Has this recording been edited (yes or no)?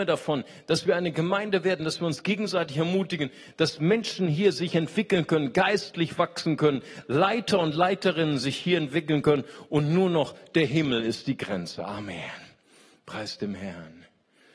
no